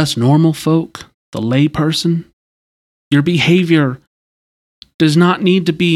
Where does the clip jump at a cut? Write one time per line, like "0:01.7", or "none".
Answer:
0:03.0